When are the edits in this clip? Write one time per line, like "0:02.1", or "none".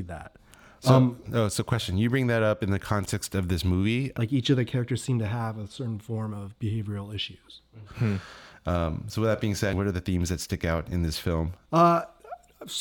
0:04.1
0:07.9
0:11.6